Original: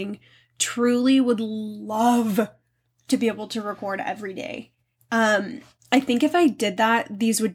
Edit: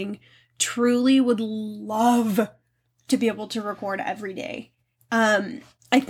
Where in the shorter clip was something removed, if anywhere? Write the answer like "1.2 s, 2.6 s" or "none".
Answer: none